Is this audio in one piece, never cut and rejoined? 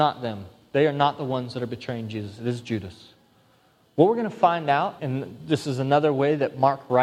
no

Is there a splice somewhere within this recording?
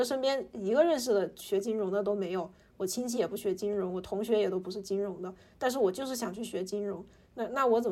yes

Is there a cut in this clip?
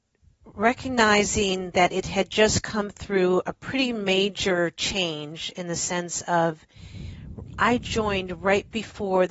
no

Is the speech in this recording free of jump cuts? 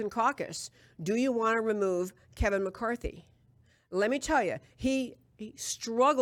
yes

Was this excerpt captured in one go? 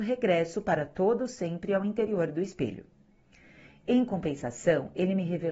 yes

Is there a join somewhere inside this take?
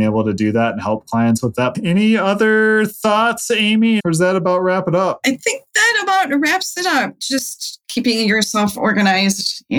yes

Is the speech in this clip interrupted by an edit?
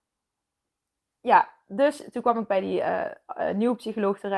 no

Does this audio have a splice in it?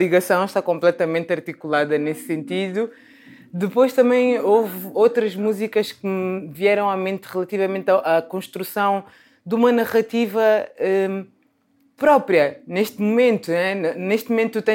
yes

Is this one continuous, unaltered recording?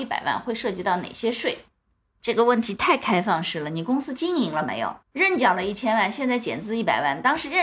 no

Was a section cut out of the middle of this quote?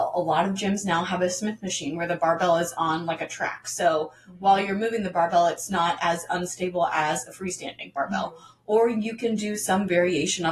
no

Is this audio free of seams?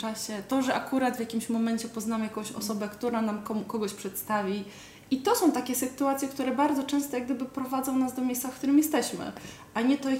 yes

